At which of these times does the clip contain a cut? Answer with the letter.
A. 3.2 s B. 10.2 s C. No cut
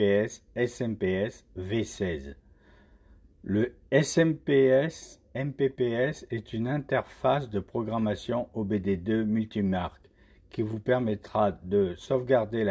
C